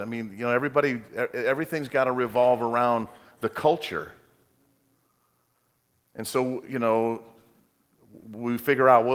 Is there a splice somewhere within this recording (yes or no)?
no